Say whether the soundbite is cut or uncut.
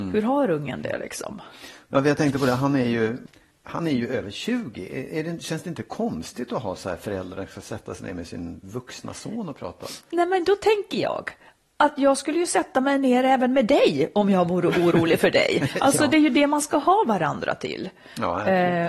uncut